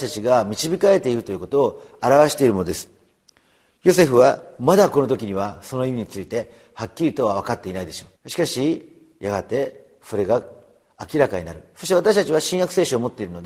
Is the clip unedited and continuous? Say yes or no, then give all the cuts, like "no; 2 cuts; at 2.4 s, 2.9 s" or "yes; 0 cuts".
no; 1 cut; at 8.2 s